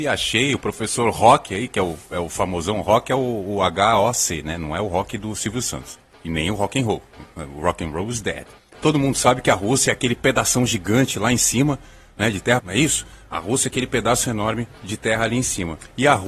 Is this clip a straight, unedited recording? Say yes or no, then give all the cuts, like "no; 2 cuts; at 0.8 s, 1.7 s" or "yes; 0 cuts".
no; 2 cuts; at 8.6 s, 12.6 s